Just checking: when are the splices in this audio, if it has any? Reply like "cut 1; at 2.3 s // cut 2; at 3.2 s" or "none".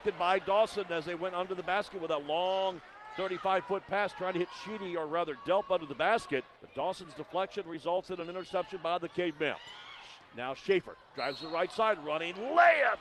cut 1; at 6.5 s